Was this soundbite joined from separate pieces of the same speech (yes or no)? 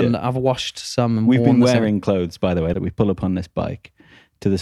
yes